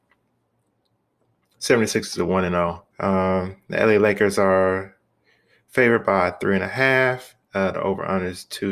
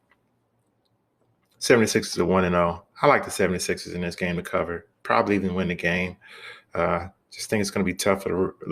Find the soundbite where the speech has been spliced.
first; 1 cut; at 2.9 s

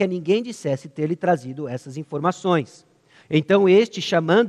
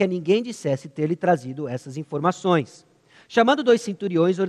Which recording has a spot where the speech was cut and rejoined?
first; 1 cut; at 3.2 s

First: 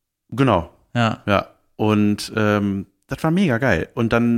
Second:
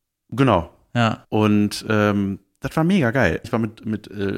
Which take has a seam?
second; 2 cuts; at 1.2 s, 3.4 s

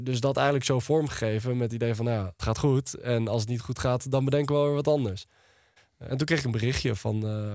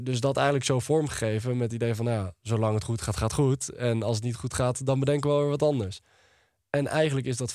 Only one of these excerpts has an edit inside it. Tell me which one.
first; 2 cuts; at 2.4 s, 5.8 s

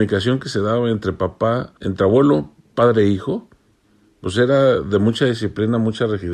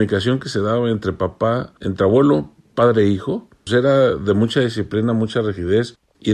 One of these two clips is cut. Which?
second; 1 cut; at 3.7 s

